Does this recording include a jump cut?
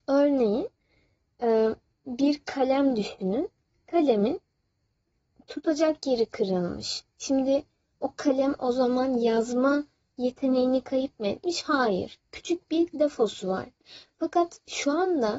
no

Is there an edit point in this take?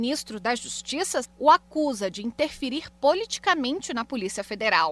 yes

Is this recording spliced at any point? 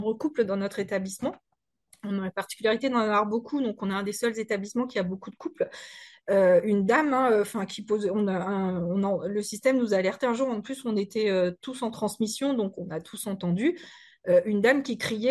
no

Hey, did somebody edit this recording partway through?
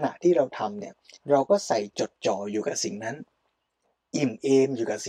yes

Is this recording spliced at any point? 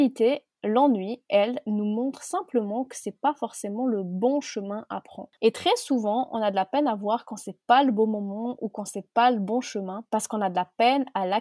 yes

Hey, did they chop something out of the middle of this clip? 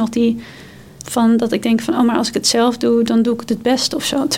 yes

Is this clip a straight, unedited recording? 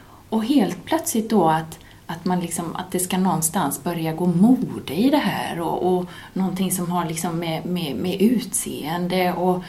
yes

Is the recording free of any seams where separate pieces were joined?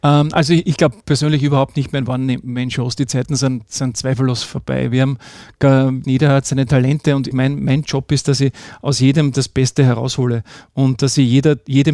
no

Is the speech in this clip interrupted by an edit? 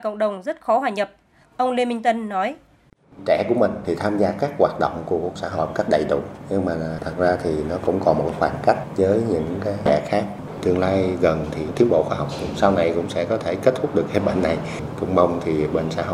yes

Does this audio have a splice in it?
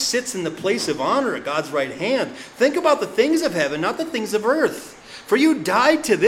no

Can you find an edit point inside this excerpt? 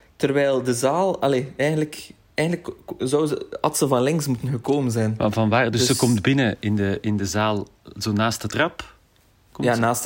no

